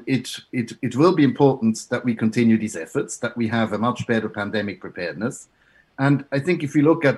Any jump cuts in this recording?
no; 0 cuts

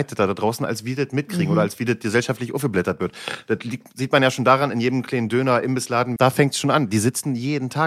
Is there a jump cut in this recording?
yes; 1 cut; at 6.2 s

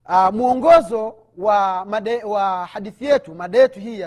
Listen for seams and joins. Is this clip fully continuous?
yes; 0 cuts

